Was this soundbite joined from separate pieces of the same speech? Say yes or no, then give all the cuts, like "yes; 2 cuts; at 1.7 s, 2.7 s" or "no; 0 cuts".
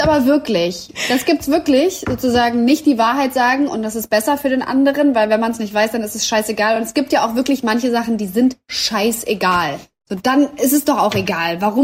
no; 0 cuts